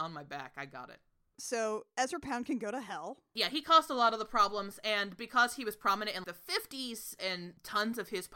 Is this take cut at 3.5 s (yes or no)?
no